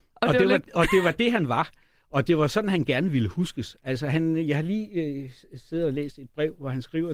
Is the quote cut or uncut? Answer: uncut